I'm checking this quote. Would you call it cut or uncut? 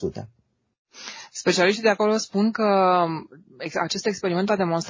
uncut